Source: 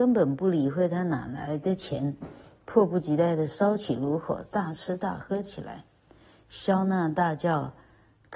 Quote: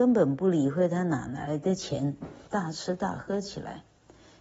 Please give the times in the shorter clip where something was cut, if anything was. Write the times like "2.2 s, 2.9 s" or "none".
2.5 s